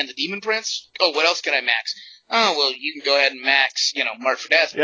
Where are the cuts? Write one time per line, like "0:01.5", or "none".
0:00.9